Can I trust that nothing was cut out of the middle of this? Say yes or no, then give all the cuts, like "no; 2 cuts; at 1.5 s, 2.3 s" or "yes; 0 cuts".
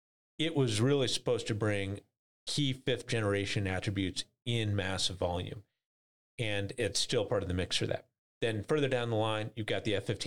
yes; 0 cuts